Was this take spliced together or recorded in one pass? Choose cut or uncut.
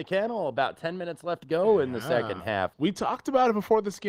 cut